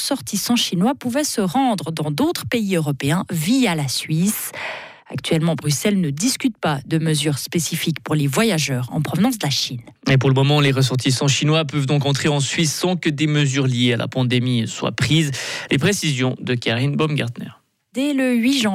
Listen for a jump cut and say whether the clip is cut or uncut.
cut